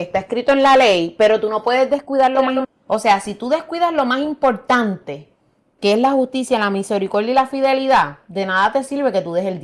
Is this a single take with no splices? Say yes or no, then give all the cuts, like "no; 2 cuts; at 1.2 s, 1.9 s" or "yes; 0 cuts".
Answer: no; 1 cut; at 2.6 s